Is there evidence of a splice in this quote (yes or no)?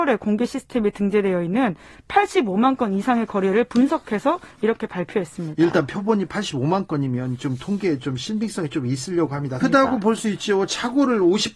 yes